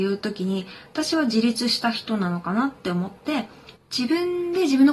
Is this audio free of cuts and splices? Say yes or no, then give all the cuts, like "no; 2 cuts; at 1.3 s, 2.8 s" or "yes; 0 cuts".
yes; 0 cuts